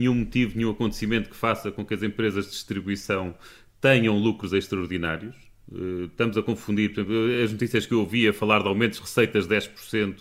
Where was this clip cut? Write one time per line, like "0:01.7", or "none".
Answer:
none

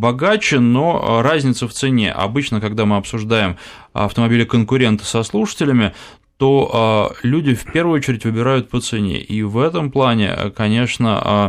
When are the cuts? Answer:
none

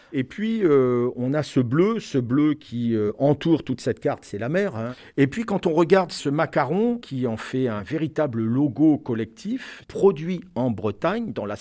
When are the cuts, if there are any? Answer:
none

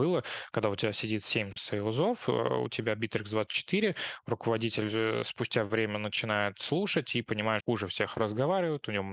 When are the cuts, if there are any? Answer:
0:07.6

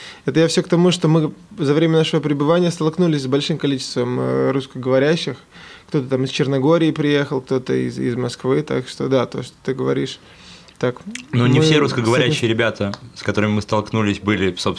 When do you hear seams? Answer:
none

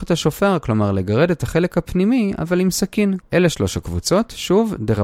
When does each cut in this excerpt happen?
0:03.2

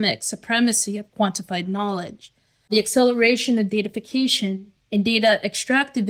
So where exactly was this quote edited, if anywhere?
none

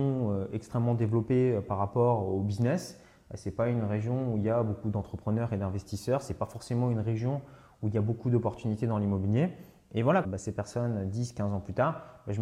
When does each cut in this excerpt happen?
0:10.2

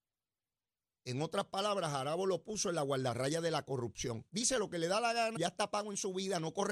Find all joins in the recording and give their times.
0:04.3
0:05.4

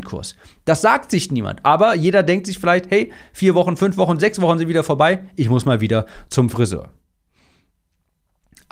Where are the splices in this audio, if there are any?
none

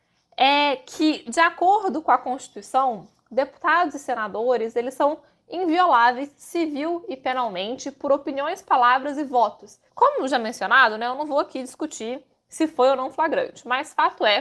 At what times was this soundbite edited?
0:09.9

